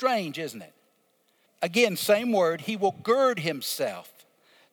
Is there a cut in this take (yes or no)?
yes